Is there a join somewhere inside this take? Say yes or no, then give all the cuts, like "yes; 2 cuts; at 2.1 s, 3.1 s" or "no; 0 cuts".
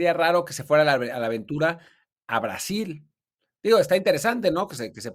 no; 0 cuts